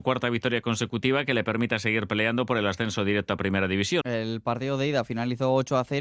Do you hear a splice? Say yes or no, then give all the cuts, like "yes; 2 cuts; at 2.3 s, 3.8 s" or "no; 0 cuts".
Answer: yes; 1 cut; at 4.0 s